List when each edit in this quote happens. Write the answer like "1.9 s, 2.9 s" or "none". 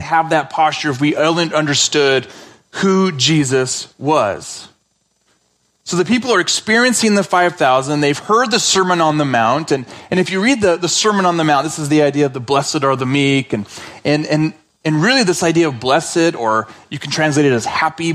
none